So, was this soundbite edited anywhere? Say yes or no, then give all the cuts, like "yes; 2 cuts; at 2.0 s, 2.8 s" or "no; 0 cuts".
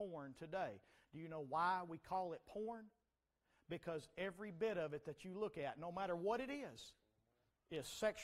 no; 0 cuts